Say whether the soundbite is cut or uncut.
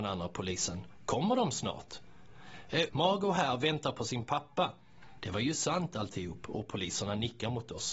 cut